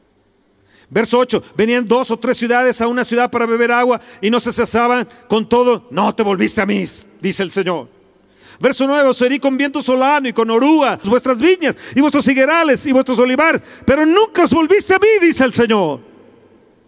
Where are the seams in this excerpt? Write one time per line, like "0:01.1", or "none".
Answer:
0:11.0